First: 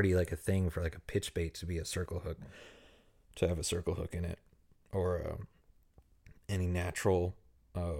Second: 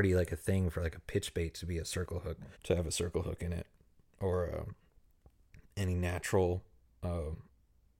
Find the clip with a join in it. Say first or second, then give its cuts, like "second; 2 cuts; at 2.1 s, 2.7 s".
second; 1 cut; at 2.5 s